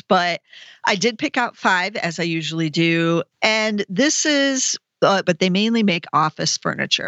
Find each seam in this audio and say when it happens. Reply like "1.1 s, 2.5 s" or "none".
3.3 s, 5.2 s